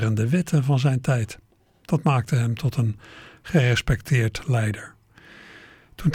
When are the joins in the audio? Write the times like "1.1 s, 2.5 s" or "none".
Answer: none